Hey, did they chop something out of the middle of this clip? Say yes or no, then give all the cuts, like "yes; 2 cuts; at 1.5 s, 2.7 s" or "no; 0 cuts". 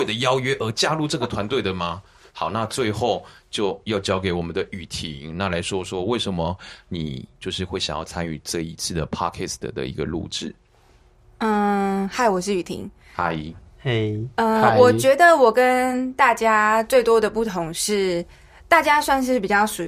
no; 0 cuts